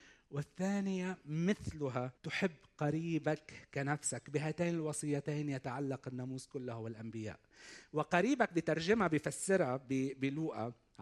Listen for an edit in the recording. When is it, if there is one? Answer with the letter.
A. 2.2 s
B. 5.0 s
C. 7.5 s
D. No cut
A